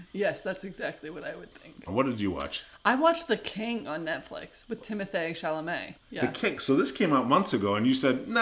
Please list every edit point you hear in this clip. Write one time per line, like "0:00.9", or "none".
0:01.9
0:06.0

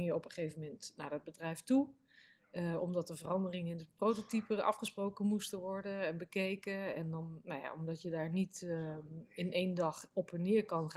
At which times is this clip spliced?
none

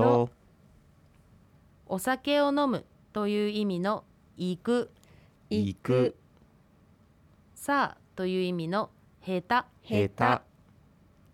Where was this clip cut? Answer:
0:09.8

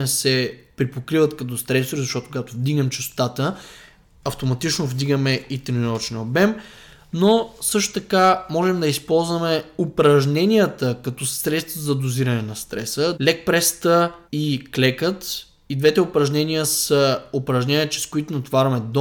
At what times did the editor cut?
0:13.1
0:14.3

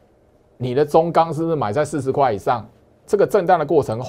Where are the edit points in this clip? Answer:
0:03.0

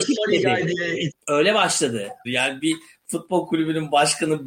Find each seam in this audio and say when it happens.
0:01.1
0:02.3

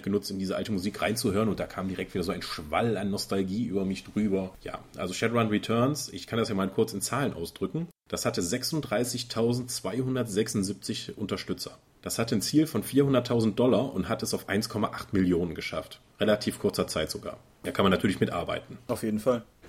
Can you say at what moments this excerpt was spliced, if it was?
0:16.1

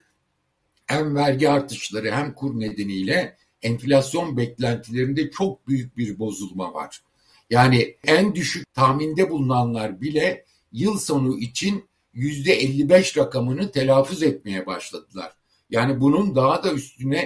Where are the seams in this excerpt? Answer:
none

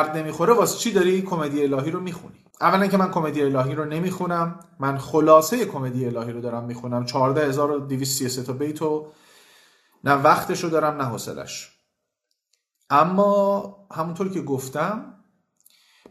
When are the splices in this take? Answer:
0:02.5

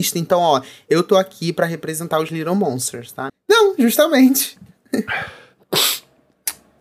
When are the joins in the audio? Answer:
0:03.3
0:04.6

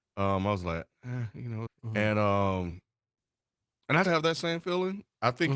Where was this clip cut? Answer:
0:01.7
0:04.1

